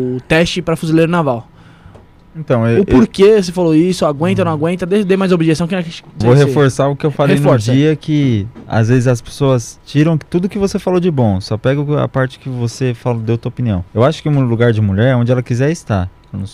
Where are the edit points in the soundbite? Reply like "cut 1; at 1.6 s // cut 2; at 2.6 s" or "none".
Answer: cut 1; at 6.2 s // cut 2; at 13.9 s